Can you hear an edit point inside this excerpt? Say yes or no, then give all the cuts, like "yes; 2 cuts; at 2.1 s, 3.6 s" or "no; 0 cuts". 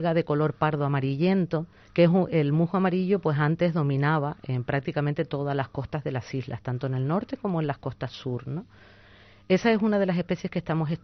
yes; 1 cut; at 1.8 s